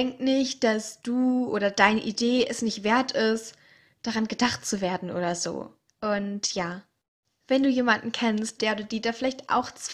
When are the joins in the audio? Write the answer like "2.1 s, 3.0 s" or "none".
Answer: 5.9 s, 8.6 s